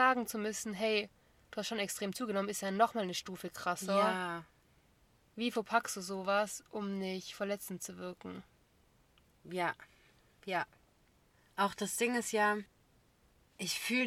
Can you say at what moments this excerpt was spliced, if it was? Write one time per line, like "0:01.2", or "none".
none